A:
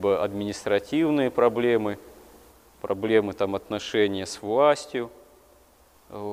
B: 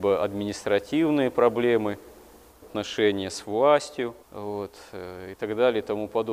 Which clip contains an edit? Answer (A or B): B